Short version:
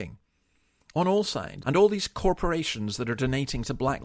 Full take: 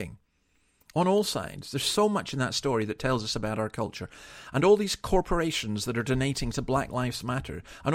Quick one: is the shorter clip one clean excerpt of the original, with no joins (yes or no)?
no